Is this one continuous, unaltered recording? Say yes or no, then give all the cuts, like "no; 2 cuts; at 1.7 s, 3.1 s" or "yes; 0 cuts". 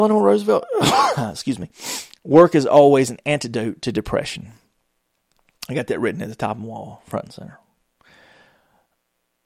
yes; 0 cuts